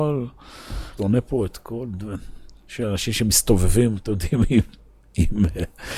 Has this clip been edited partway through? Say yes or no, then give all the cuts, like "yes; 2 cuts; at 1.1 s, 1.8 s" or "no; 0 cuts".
yes; 1 cut; at 1.0 s